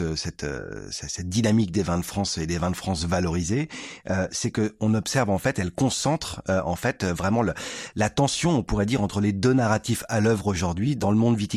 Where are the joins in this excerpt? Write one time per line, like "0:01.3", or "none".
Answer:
none